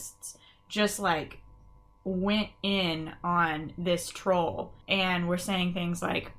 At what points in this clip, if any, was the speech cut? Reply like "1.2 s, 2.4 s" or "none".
4.8 s